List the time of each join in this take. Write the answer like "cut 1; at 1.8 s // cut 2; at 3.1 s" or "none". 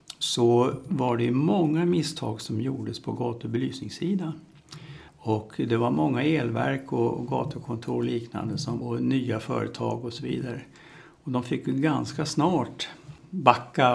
cut 1; at 5.1 s // cut 2; at 8.8 s